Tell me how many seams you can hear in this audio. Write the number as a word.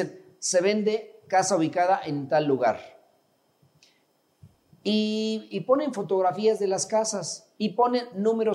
one